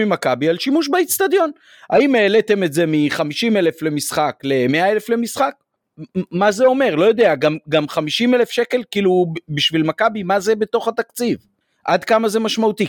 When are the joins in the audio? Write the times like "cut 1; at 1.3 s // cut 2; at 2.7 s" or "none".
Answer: none